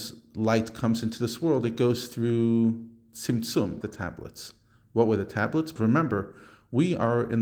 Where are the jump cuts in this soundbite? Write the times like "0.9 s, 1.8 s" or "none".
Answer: 3.8 s, 5.8 s